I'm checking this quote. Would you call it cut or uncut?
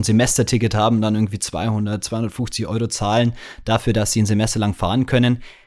uncut